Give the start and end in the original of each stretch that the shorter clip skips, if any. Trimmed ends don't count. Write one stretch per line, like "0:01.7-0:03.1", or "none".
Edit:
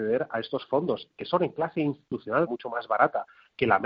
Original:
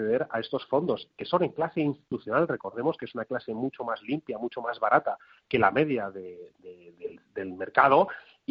0:02.5-0:04.4